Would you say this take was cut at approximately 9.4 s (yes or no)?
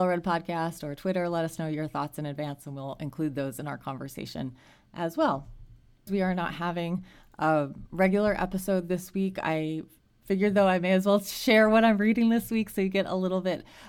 no